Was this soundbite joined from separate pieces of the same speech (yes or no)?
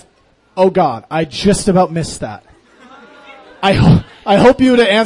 no